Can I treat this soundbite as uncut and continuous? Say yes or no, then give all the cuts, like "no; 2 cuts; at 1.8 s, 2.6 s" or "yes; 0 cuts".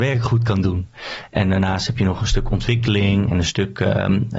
yes; 0 cuts